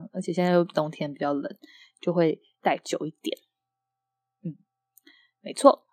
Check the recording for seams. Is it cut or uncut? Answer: uncut